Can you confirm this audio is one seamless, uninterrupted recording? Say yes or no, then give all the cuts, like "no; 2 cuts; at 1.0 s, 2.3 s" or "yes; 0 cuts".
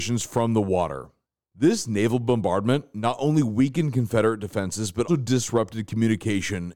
no; 1 cut; at 5.1 s